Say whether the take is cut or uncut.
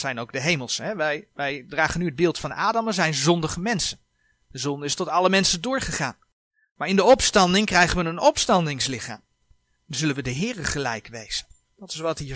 uncut